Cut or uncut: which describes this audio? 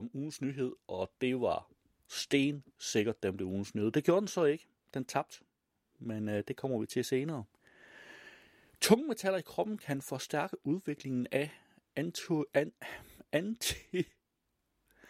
uncut